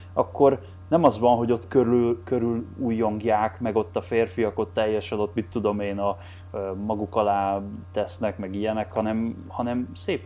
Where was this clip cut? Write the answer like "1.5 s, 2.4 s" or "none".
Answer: none